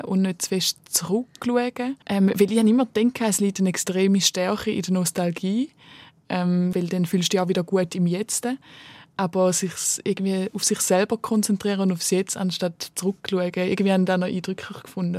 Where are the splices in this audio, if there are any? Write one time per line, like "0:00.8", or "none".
0:02.0
0:06.7